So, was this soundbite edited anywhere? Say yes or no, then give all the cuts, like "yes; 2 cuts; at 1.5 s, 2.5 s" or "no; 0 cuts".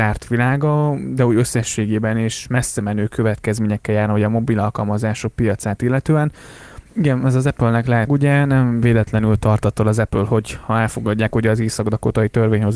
yes; 2 cuts; at 6.9 s, 8.1 s